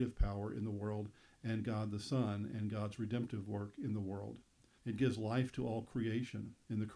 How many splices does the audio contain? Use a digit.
1